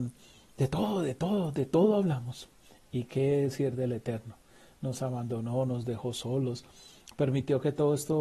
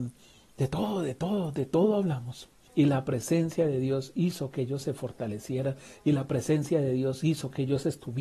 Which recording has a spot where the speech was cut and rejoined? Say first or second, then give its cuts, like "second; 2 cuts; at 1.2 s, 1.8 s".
second; 1 cut; at 2.7 s